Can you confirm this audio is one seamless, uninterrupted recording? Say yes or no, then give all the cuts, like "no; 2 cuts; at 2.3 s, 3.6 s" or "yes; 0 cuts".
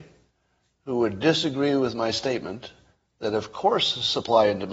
yes; 0 cuts